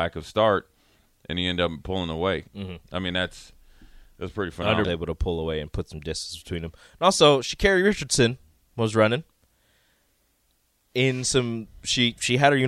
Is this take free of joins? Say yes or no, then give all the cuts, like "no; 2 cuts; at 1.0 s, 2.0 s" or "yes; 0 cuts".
no; 2 cuts; at 2.5 s, 4.8 s